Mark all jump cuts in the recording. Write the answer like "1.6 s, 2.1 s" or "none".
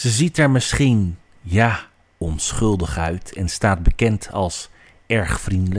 none